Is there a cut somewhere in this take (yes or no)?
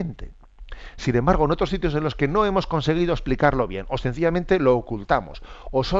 no